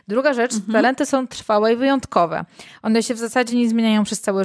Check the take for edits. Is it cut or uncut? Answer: uncut